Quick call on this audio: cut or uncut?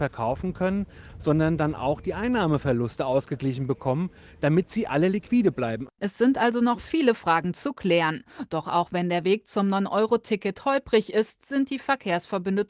uncut